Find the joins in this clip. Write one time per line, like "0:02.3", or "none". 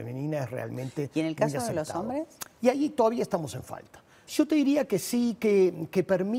0:04.3